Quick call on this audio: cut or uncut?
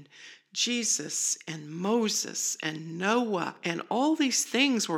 uncut